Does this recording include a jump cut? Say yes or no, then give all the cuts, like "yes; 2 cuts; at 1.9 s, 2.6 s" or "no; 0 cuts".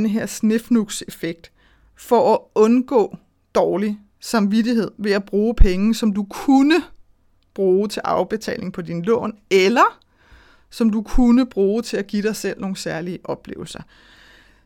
no; 0 cuts